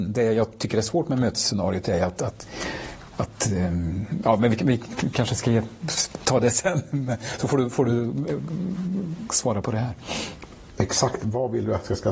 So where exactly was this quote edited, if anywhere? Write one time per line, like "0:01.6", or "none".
none